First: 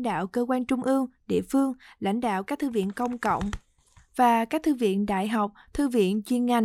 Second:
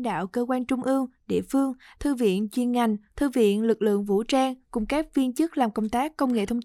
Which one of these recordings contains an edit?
second; 1 cut; at 1.9 s

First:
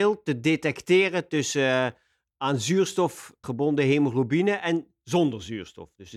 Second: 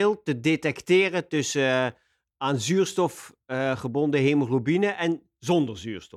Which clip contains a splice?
first; 1 cut; at 3.4 s

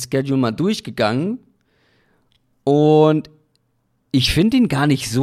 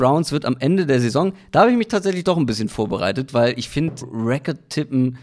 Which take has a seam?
second; 1 cut; at 4.0 s

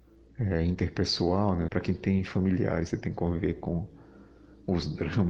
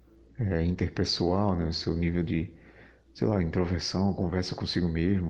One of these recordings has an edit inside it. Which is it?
first; 2 cuts; at 1.7 s, 2.9 s

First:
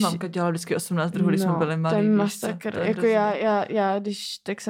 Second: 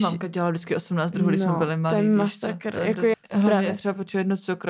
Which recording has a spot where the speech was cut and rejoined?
second; 1 cut; at 3.1 s

